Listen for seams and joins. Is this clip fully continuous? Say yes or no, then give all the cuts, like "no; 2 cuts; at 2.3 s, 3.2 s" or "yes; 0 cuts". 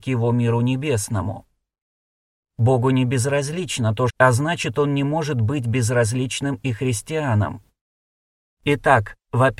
no; 2 cuts; at 2.4 s, 4.1 s